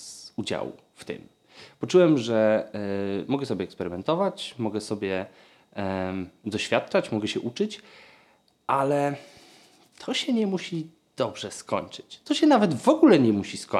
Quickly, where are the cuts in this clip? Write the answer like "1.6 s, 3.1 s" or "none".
none